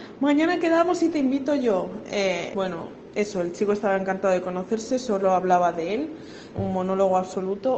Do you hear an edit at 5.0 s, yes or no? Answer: no